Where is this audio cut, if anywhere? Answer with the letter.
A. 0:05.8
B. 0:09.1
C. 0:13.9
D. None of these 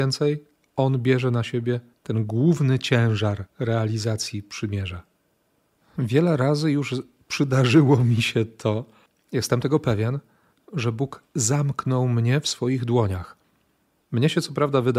A